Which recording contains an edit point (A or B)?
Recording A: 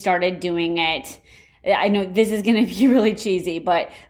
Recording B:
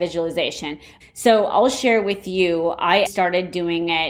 B